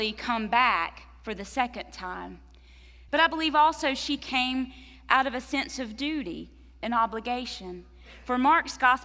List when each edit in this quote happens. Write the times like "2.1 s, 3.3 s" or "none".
3.1 s